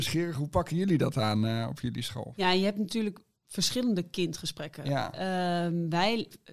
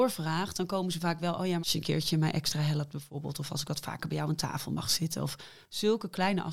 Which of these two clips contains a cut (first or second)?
second